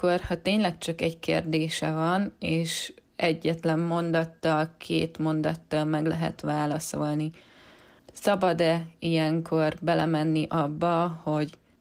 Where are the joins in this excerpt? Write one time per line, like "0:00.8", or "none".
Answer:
none